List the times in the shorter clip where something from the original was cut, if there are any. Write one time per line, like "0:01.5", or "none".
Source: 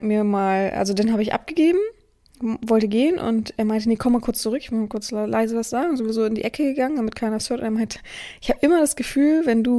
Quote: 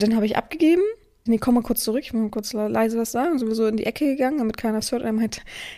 0:01.3